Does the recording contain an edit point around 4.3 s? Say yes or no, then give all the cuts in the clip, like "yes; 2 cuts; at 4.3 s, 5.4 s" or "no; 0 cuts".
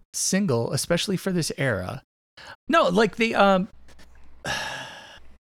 no; 1 cut; at 2.5 s